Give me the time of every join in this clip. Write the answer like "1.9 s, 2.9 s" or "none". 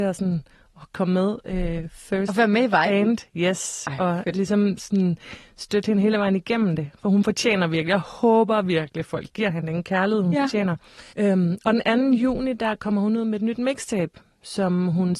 11.1 s

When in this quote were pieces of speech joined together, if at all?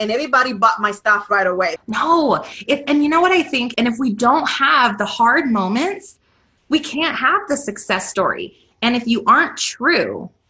1.8 s, 3.7 s

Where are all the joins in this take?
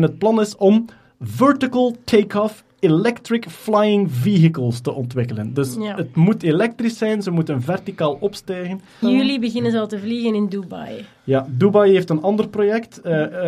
9.0 s

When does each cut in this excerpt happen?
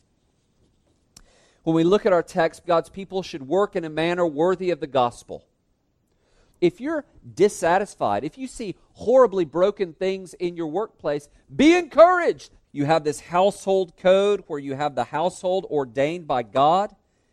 2.6 s, 6.5 s, 12.6 s

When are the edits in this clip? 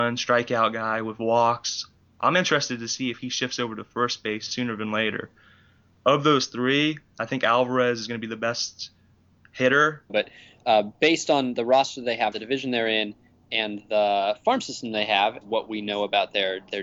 10.1 s, 12.3 s, 15.4 s

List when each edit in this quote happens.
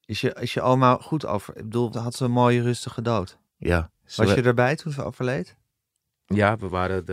1.9 s, 3.5 s

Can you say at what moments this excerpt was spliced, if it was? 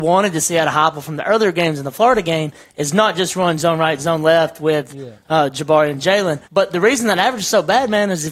6.5 s

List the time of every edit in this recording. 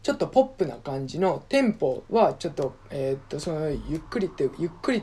2.0 s

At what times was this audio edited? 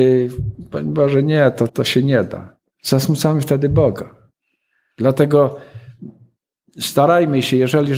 1.7 s

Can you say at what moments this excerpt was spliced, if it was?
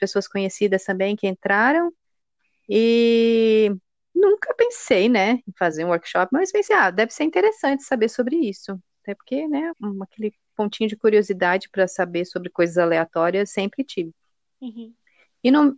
9.7 s

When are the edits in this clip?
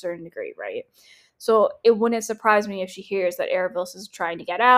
none

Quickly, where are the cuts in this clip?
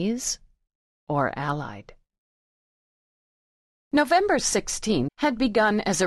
5.1 s

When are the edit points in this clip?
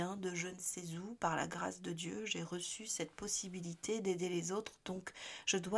none

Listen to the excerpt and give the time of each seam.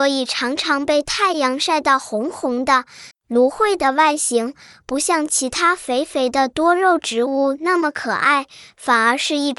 3.1 s

